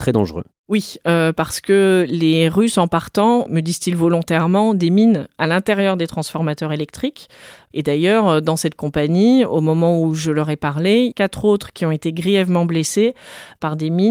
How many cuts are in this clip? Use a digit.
2